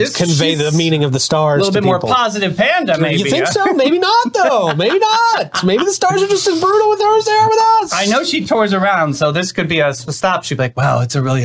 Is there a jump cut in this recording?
no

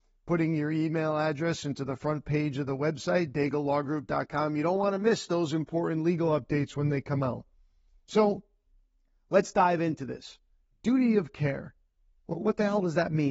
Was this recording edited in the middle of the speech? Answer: no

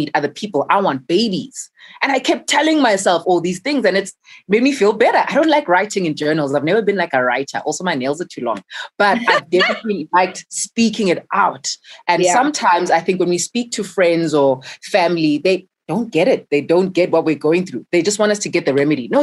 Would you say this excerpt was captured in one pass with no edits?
yes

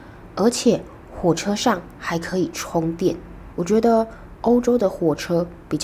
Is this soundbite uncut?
no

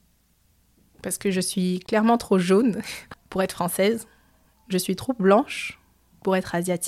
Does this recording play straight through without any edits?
no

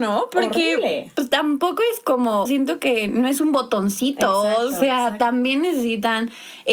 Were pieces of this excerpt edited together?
yes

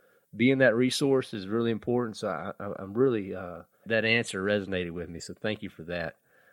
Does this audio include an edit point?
yes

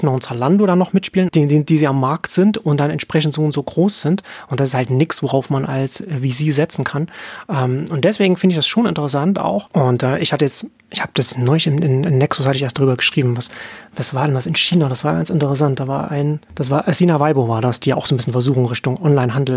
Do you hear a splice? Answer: yes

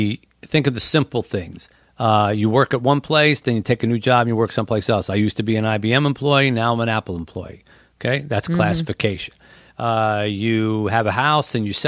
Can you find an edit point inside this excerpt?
no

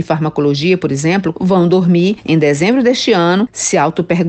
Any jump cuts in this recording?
yes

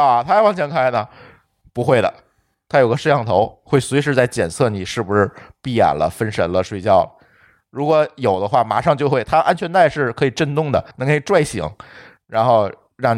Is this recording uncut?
no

